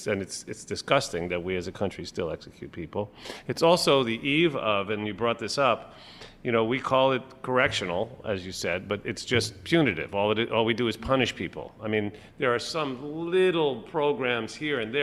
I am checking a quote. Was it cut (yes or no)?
no